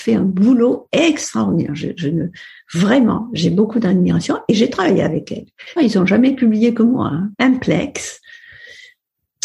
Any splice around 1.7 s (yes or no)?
no